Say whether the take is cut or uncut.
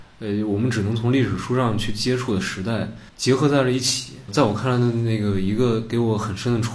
uncut